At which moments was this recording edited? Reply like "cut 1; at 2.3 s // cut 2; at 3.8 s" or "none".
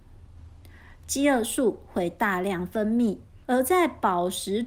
cut 1; at 3.4 s